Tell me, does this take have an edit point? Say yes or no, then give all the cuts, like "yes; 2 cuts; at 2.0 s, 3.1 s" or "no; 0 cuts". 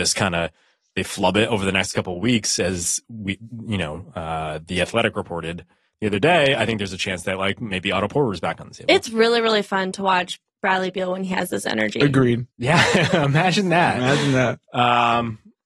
yes; 1 cut; at 12.5 s